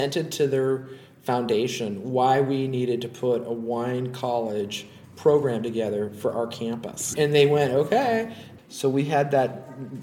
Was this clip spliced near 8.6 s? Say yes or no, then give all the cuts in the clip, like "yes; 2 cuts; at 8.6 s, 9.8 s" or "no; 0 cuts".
yes; 2 cuts; at 7.1 s, 8.6 s